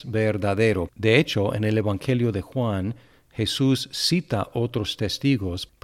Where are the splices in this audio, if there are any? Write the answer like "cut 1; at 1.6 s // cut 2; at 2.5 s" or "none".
cut 1; at 0.9 s